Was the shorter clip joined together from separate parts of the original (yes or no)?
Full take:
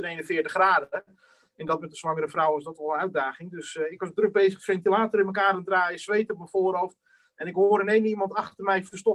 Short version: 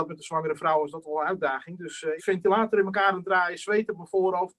yes